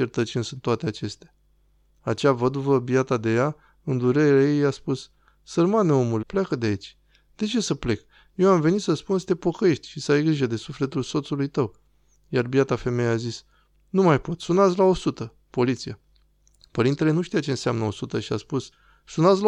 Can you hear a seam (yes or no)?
yes